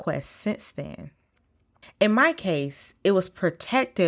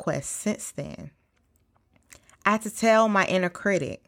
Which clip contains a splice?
first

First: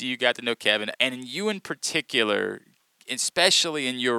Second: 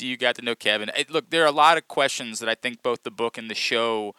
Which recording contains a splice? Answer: first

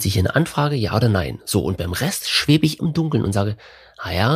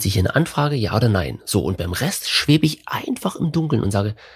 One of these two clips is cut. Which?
first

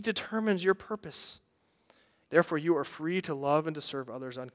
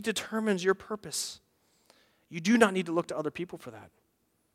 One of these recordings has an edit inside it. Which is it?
first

